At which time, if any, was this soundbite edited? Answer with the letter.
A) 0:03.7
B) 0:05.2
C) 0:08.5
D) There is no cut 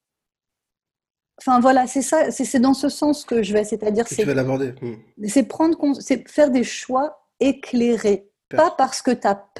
C